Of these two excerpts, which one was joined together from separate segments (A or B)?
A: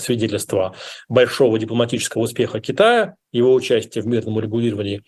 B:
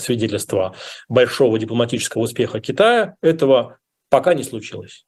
B